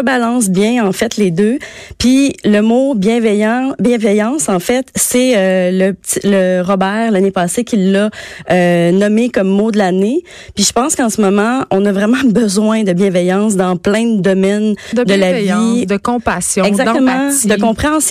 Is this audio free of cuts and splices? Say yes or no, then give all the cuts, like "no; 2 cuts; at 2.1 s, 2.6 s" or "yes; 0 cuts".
yes; 0 cuts